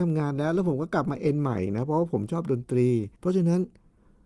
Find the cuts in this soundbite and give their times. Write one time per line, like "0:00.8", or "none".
0:03.2